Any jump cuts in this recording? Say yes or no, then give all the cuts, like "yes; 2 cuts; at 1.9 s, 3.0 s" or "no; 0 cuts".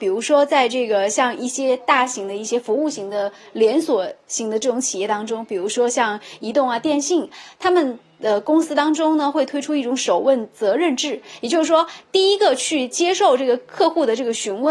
no; 0 cuts